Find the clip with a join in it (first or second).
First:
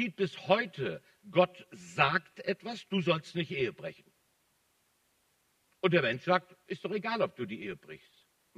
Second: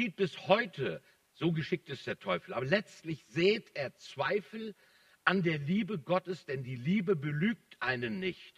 second